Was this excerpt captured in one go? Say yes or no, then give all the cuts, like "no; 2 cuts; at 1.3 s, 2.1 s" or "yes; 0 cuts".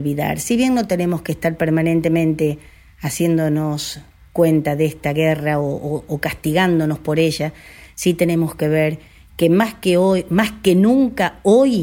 yes; 0 cuts